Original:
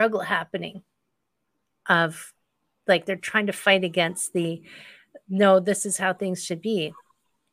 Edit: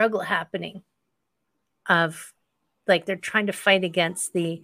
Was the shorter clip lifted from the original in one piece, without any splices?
yes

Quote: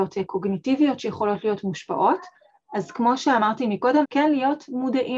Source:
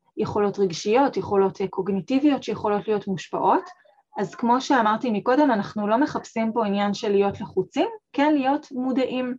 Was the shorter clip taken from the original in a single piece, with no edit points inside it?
no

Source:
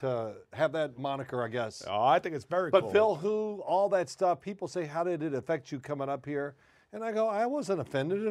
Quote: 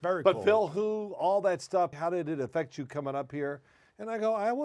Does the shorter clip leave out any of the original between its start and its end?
yes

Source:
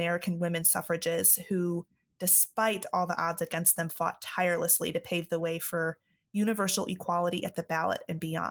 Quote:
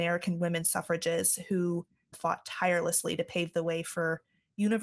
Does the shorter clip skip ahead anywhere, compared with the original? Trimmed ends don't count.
yes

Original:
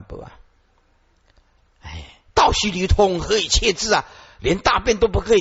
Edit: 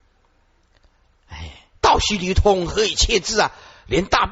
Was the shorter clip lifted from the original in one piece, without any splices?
yes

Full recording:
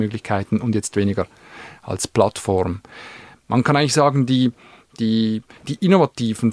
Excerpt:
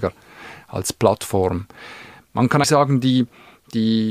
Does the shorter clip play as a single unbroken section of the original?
no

